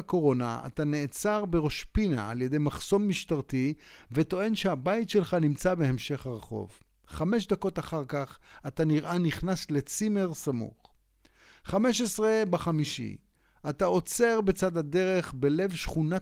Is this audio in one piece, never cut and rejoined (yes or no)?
yes